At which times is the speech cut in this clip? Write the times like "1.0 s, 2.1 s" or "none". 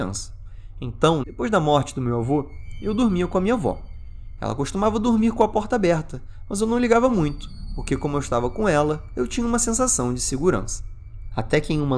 1.2 s